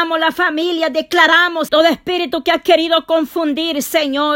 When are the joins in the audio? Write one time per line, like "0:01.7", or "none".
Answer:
0:01.7

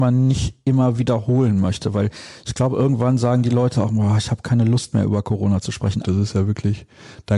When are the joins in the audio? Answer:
0:06.0

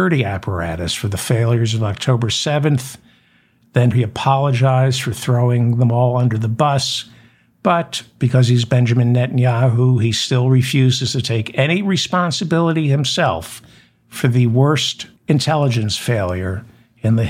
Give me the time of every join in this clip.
0:03.9
0:15.2

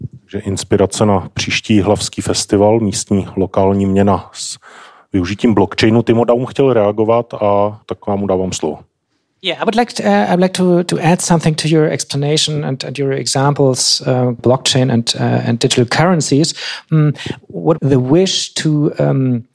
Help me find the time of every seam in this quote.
0:14.4
0:17.8

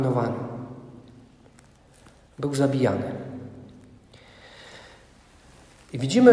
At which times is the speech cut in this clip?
none

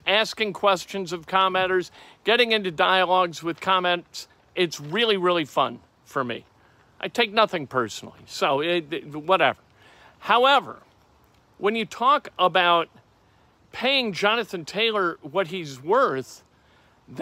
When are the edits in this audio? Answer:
none

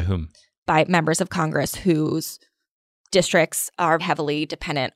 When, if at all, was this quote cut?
0:04.0

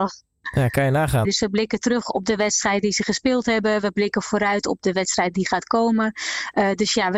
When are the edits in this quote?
0:01.2

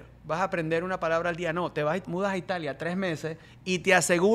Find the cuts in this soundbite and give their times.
0:02.0

